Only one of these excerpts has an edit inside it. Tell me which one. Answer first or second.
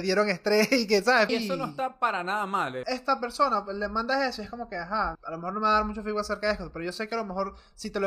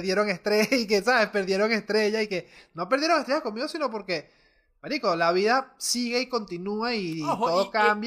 first